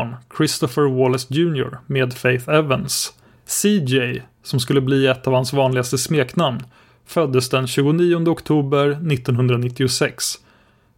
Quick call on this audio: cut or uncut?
uncut